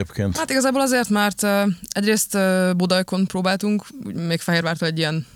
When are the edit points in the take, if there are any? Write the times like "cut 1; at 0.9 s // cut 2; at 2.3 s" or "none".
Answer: none